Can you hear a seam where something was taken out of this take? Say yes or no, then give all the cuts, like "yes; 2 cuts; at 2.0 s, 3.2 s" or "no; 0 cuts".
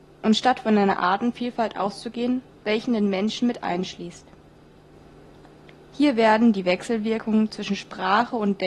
no; 0 cuts